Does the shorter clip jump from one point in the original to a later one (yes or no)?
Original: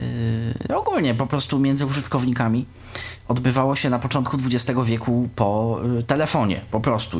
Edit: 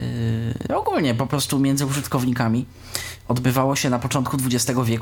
no